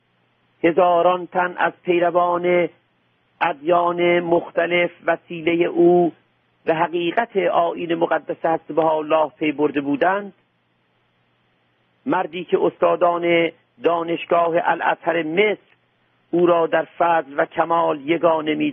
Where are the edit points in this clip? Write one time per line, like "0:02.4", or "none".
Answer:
none